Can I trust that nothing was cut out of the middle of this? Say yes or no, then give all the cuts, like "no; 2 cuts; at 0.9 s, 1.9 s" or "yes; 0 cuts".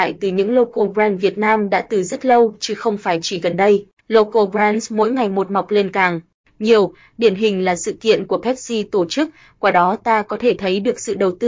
no; 1 cut; at 4.0 s